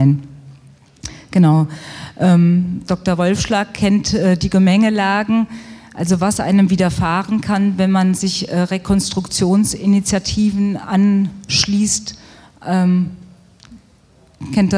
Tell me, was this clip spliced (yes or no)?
no